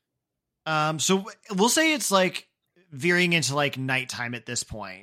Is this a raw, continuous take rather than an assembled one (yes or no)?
yes